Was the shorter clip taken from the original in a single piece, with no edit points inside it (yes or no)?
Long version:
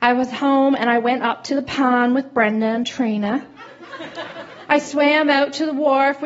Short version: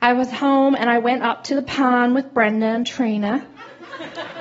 yes